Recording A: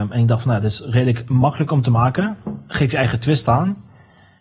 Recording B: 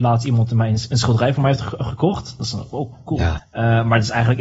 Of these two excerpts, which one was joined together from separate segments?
B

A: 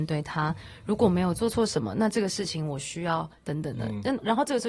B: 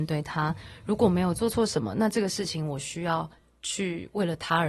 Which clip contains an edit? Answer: A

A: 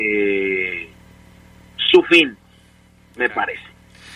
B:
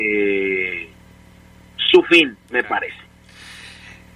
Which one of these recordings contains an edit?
B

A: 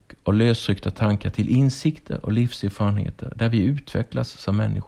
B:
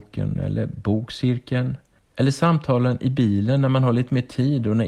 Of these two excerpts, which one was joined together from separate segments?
B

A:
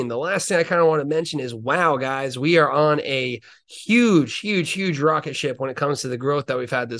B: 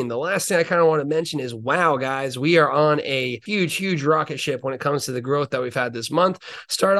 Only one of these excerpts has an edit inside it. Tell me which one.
B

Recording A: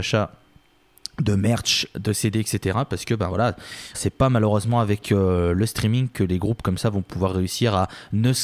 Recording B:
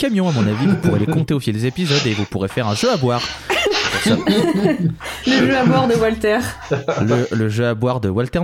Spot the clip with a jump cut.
A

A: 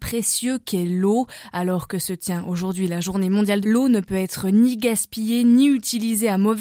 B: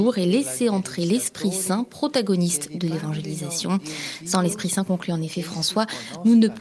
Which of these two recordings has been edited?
A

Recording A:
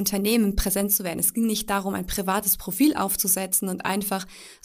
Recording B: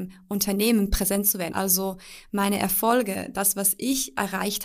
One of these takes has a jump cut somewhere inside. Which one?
B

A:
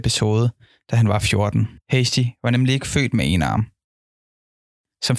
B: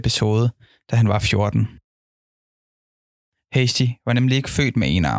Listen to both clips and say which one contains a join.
A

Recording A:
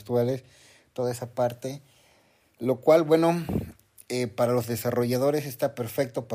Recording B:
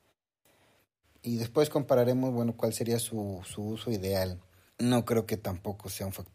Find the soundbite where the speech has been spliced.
B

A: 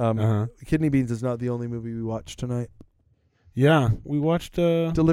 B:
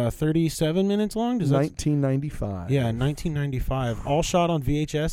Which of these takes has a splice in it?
A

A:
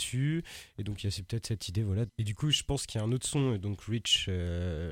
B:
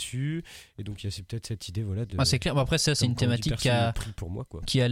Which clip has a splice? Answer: A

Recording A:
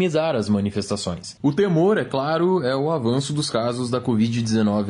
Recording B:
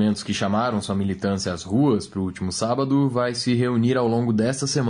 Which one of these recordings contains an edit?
A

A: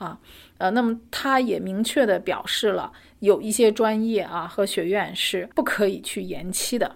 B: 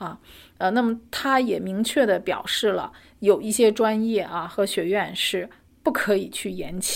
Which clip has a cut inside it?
A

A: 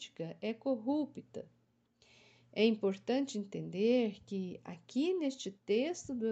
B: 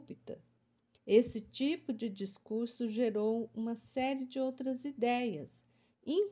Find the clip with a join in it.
B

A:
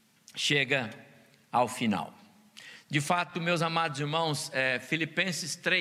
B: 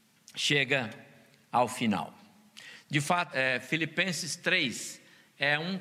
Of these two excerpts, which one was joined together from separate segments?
B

